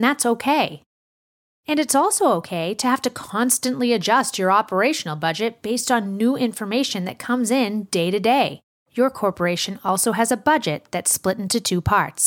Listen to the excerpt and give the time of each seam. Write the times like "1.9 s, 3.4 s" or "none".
8.8 s